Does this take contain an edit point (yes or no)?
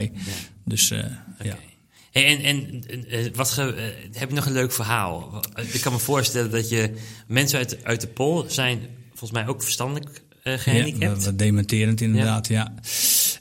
no